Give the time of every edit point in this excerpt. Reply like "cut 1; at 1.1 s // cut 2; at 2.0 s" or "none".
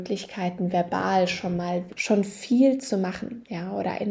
cut 1; at 1.9 s